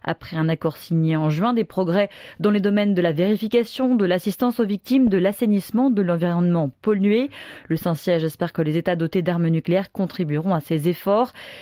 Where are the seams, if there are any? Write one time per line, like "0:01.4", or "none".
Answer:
none